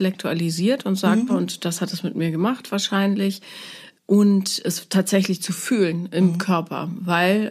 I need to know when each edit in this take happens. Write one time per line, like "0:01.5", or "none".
0:01.3